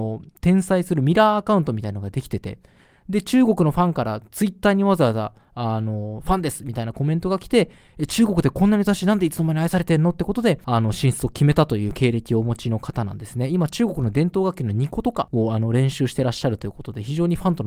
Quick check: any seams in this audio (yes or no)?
no